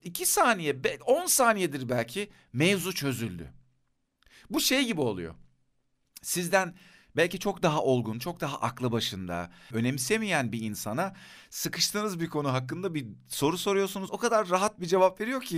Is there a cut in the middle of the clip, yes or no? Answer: yes